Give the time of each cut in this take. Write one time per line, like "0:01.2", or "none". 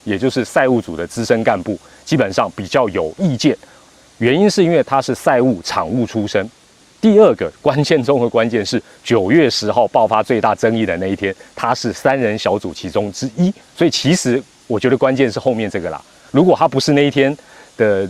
none